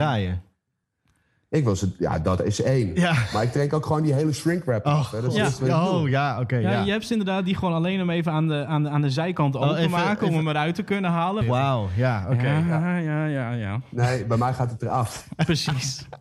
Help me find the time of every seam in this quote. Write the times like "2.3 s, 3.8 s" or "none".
11.4 s